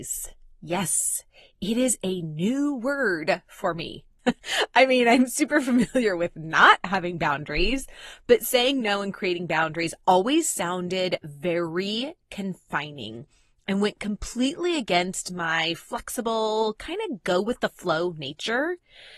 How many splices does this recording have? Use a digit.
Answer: 1